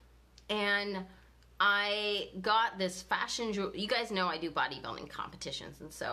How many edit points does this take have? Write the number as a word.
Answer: zero